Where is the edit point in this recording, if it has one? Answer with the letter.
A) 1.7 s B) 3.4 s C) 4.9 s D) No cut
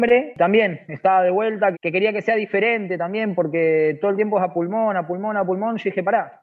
A